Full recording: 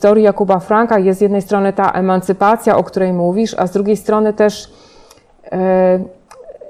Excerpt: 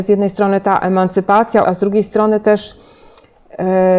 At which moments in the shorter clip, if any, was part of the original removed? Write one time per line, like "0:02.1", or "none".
0:01.6